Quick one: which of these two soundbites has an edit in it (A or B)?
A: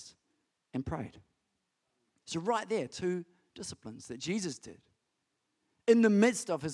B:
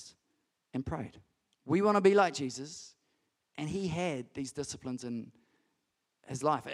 B